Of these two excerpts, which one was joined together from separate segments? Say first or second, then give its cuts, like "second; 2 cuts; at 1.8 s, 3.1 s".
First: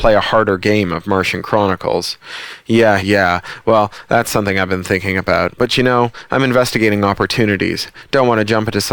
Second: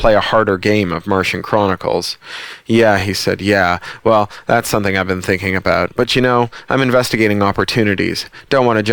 first; 1 cut; at 3.0 s